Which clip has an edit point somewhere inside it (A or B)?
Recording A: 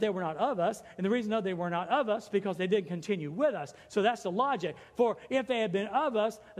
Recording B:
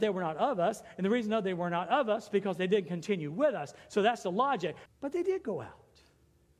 B